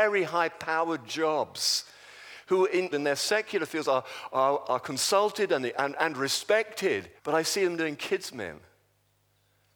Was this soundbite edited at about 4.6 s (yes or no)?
no